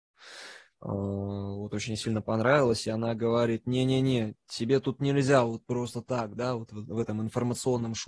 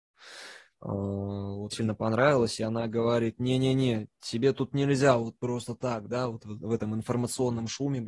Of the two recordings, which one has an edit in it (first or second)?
second